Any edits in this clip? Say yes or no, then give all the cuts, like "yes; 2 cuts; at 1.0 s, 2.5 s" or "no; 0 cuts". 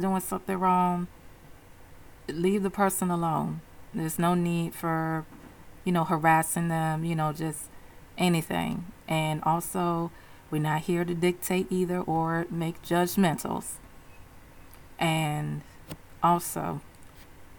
yes; 1 cut; at 15.0 s